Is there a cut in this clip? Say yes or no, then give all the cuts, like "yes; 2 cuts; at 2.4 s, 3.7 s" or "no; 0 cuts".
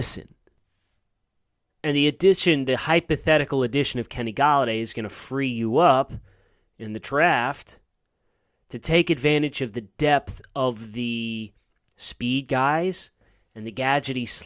no; 0 cuts